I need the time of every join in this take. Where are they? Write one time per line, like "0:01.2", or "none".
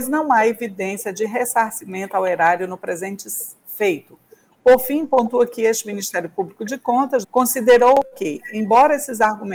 0:04.5
0:07.2